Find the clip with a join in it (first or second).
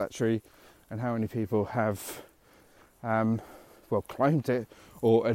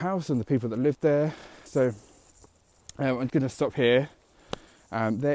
second